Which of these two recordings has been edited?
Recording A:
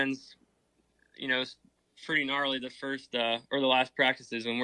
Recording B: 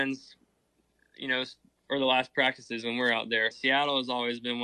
B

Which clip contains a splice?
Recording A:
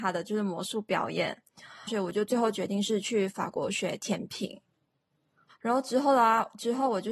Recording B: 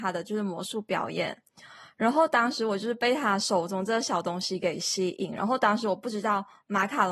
A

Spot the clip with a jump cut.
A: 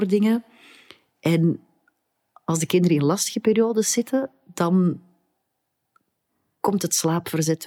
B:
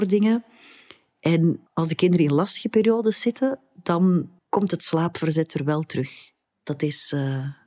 B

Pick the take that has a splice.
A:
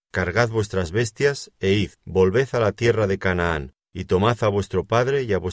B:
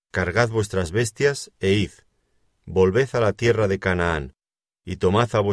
A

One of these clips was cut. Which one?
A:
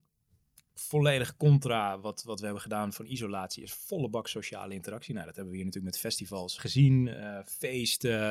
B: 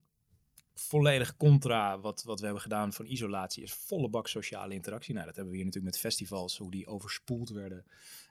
A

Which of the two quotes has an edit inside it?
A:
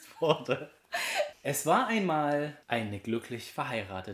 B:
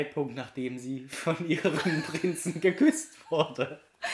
A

